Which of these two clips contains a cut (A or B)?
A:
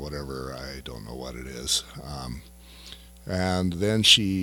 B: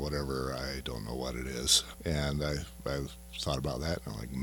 B